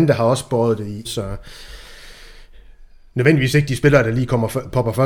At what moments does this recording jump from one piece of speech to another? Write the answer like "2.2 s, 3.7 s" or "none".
1.0 s